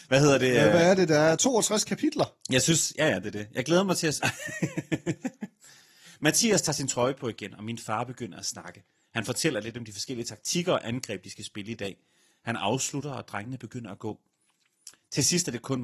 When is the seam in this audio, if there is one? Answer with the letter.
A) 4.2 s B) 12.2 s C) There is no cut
A